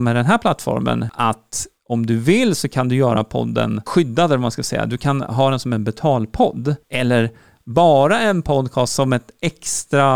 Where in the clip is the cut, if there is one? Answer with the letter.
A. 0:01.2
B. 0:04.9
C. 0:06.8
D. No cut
C